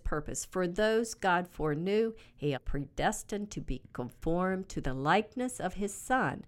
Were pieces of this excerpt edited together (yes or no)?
yes